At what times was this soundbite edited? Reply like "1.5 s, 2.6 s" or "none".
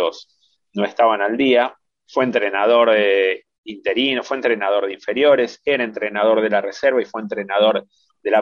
2.0 s